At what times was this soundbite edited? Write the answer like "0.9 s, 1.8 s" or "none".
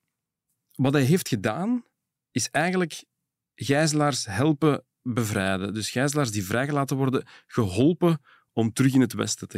none